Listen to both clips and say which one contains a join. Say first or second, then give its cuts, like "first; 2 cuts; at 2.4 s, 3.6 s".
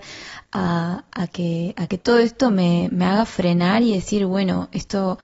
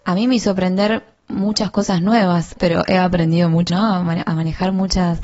second; 2 cuts; at 2.6 s, 3.7 s